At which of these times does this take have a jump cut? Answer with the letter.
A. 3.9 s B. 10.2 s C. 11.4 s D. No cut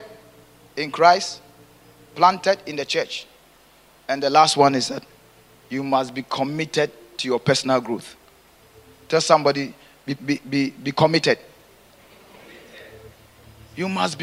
B